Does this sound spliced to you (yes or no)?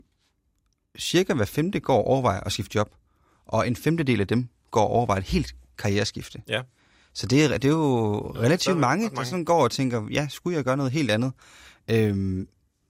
no